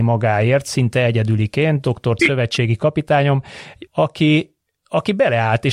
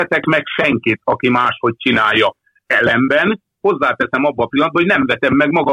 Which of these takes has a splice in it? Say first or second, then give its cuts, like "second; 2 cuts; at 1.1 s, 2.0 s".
first; 2 cuts; at 2.2 s, 3.9 s